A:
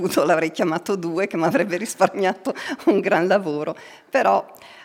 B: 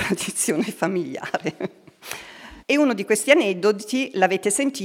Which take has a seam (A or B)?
B